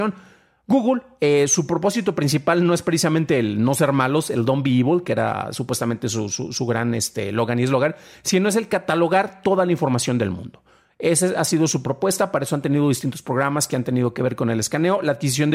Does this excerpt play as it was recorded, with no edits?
yes; 0 cuts

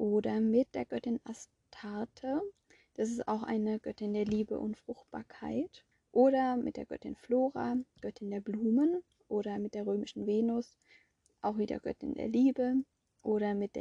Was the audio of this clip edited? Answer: yes; 1 cut; at 5.9 s

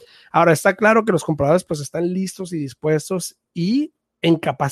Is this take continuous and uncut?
yes; 0 cuts

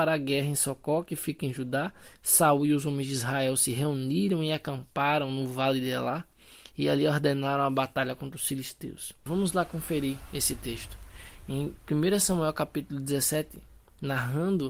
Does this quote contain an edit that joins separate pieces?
yes; 2 cuts; at 2.2 s, 9.3 s

